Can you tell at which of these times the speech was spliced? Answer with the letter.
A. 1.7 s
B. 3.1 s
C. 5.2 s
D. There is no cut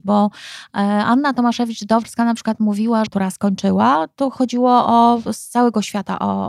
B